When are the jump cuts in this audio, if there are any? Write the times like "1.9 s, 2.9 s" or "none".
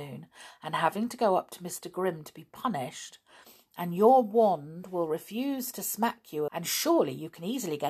6.5 s